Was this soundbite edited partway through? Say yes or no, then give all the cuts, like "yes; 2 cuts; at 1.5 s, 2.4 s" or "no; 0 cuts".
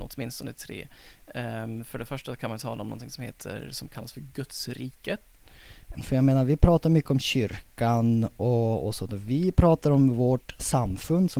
yes; 1 cut; at 5.9 s